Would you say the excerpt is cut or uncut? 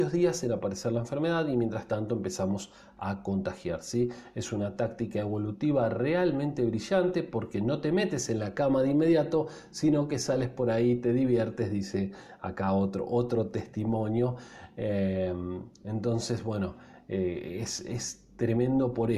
uncut